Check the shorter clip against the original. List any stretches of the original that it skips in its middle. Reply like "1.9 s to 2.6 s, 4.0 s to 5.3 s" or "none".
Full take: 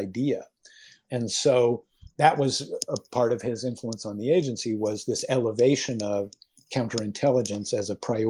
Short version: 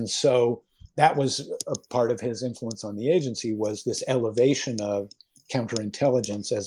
none